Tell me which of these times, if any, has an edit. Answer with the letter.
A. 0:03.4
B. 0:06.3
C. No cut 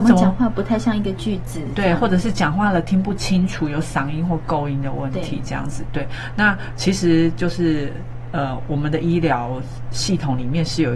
C